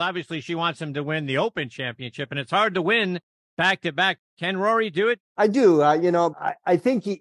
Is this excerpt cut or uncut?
cut